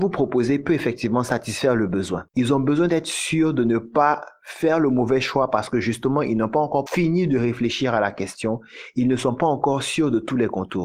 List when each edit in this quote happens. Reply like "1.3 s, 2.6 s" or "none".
2.3 s